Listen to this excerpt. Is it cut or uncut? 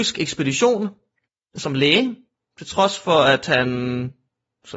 uncut